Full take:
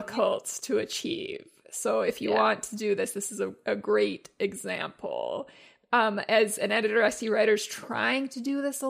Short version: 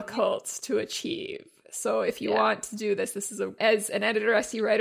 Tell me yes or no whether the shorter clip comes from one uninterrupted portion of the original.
no